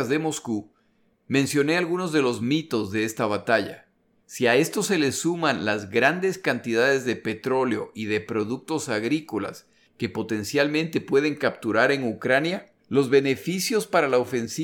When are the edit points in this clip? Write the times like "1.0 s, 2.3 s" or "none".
4.2 s, 12.8 s